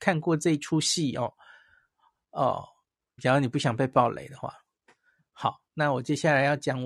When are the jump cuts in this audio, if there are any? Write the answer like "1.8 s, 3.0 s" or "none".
3.2 s, 5.2 s

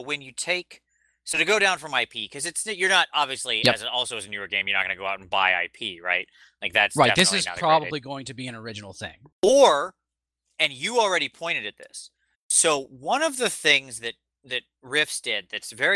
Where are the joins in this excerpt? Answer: 9.3 s

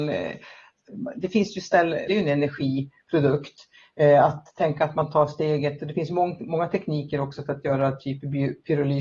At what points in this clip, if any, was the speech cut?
2.1 s

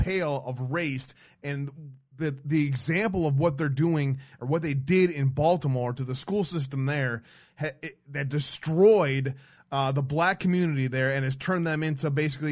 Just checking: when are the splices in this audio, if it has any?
none

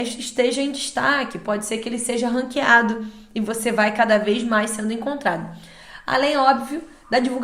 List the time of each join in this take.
none

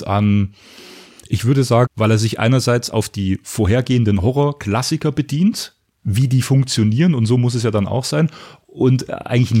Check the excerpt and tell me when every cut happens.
1.9 s

